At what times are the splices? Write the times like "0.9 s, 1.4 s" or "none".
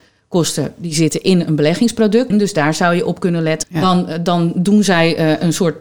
2.3 s, 3.6 s